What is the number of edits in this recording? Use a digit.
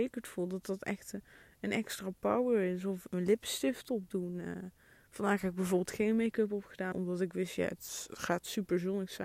2